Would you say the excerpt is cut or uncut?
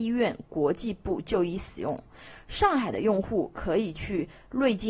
uncut